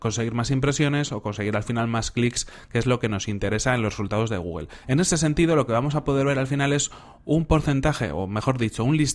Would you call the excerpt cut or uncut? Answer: cut